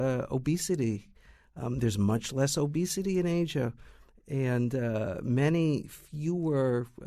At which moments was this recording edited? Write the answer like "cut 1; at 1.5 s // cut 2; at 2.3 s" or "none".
none